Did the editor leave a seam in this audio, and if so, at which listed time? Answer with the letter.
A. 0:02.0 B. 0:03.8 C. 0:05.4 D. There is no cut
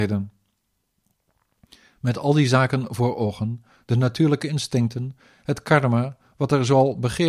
B